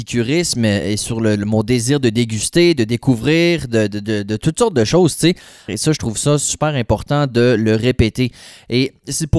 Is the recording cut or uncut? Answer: cut